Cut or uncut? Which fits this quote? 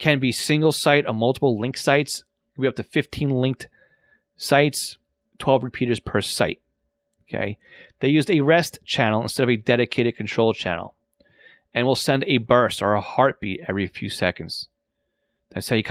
uncut